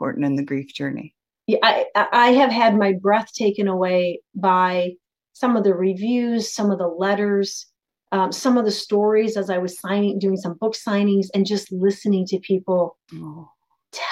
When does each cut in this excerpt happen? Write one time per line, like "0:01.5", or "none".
0:01.3